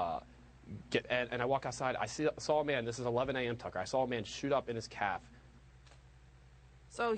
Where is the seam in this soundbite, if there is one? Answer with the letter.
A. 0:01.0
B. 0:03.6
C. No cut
A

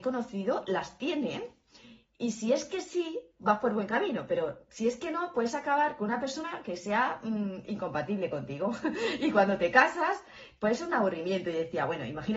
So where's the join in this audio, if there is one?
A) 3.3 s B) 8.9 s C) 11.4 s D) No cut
D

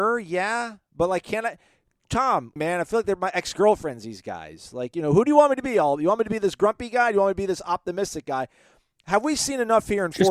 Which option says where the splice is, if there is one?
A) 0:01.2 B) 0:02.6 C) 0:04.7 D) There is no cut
B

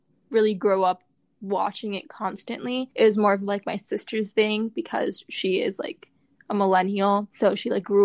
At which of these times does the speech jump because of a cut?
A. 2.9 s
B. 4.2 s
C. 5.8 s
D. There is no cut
D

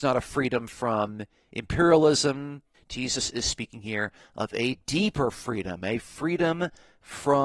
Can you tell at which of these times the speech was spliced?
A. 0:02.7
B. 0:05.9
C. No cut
A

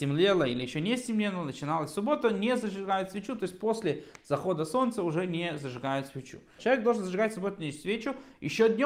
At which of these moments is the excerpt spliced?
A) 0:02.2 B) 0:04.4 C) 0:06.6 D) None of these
C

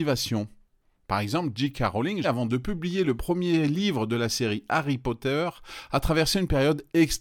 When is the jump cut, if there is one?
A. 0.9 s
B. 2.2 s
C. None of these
B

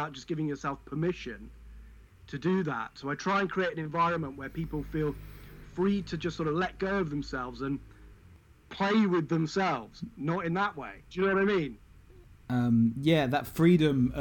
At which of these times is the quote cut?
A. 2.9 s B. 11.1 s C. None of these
B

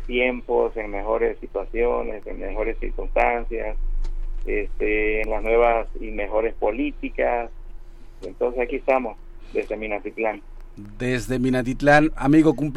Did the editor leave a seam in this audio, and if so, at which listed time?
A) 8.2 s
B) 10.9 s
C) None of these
A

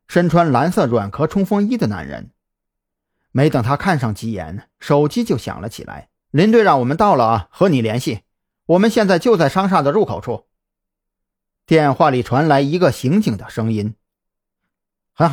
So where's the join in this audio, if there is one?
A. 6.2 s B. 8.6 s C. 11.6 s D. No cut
A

